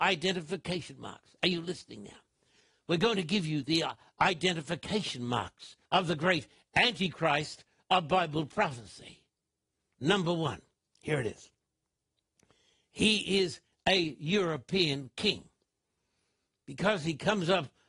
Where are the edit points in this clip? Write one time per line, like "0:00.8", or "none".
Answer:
0:05.8